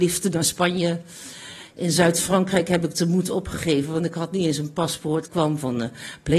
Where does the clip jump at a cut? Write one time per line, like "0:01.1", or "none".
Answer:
0:05.2